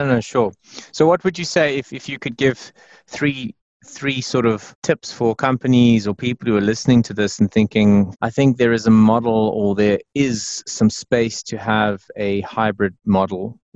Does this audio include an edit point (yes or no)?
no